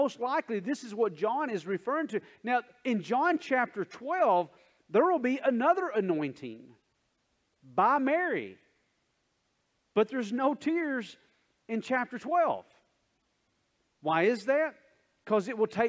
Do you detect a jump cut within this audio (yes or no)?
no